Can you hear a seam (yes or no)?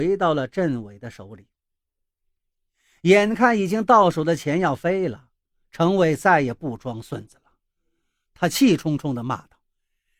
no